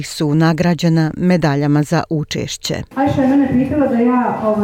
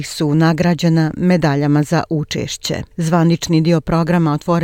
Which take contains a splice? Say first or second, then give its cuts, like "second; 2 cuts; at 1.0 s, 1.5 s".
first; 1 cut; at 2.9 s